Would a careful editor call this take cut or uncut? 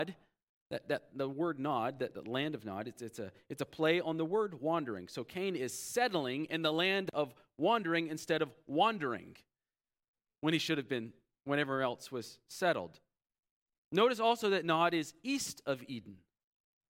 uncut